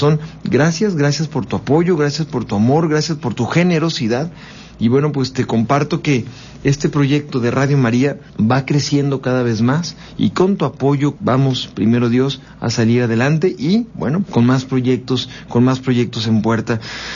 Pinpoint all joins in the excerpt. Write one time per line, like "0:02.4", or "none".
0:08.3
0:11.2
0:14.2